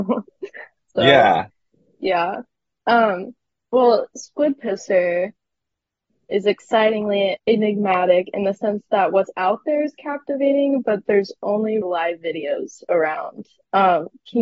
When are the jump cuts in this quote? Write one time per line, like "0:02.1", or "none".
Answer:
0:07.4
0:11.8